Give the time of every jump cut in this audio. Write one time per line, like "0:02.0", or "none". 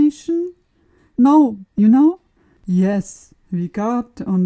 0:01.7